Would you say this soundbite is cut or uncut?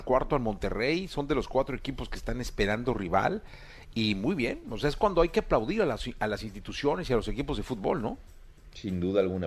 uncut